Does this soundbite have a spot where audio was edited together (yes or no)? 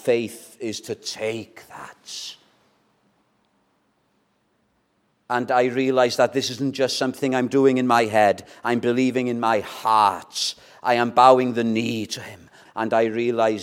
yes